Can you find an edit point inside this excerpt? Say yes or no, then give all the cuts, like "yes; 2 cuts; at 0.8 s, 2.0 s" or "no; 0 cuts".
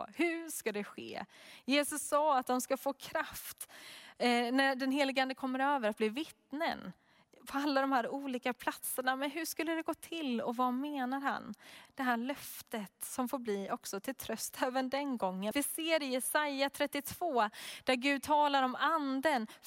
yes; 2 cuts; at 11.9 s, 15.5 s